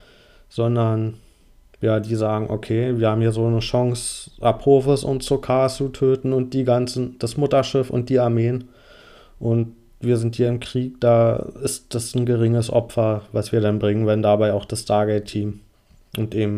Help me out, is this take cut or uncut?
uncut